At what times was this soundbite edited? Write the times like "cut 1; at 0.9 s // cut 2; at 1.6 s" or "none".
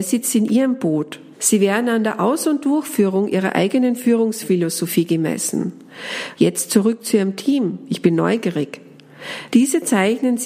cut 1; at 1.3 s // cut 2; at 6.4 s // cut 3; at 9.5 s

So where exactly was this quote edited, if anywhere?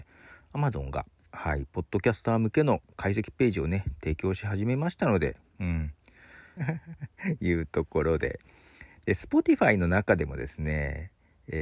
cut 1; at 6.6 s

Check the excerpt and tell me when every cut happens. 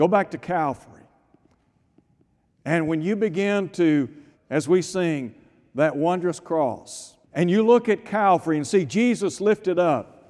cut 1; at 4.3 s // cut 2; at 7.2 s

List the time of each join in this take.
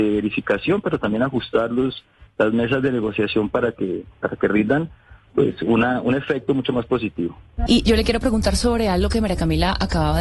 cut 1; at 7.7 s

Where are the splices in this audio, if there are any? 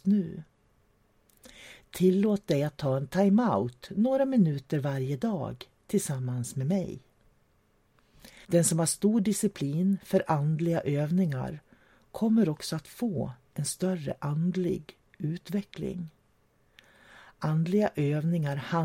cut 1; at 8.4 s

